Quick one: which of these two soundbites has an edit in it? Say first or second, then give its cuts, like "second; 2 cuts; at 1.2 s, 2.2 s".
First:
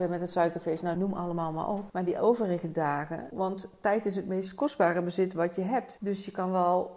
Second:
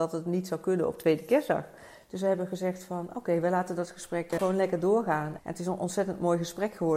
first; 1 cut; at 3.3 s